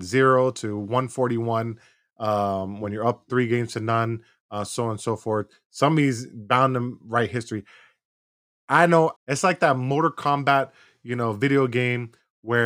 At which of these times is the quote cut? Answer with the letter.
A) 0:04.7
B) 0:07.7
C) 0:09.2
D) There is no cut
C